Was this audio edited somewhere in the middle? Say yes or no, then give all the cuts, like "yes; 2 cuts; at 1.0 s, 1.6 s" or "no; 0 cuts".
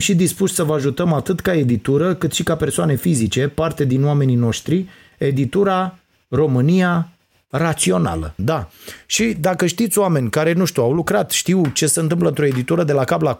yes; 1 cut; at 8.4 s